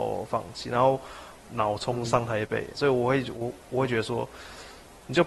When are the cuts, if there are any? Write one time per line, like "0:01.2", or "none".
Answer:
0:01.4
0:02.7